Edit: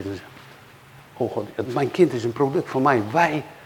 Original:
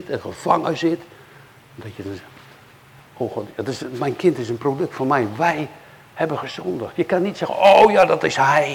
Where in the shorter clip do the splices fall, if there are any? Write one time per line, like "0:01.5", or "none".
0:01.7